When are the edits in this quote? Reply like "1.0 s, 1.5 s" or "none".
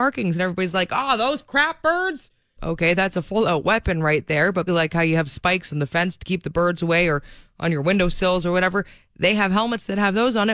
2.6 s, 4.7 s

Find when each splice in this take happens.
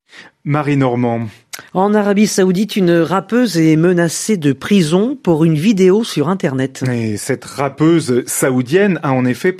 none

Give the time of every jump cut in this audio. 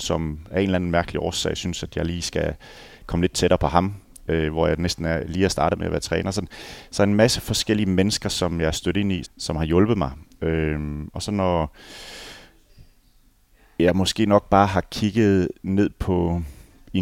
9.2 s

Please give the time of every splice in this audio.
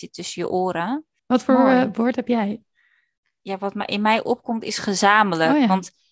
1.2 s

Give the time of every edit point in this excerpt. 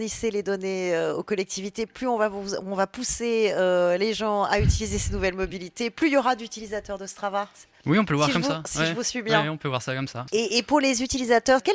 none

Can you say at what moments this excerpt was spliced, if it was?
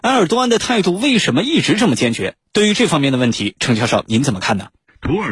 2.4 s

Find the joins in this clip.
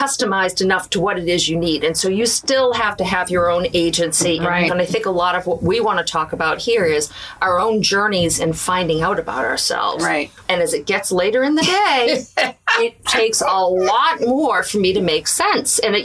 4.7 s, 10.4 s

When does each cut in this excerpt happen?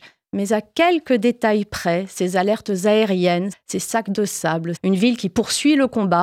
3.5 s, 4.8 s

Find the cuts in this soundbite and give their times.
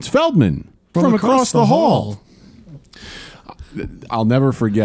0.9 s

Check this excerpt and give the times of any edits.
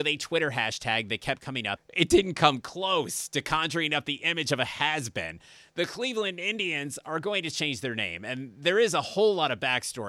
1.8 s

